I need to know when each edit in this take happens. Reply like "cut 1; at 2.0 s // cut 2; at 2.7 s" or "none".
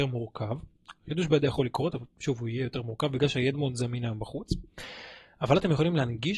cut 1; at 3.5 s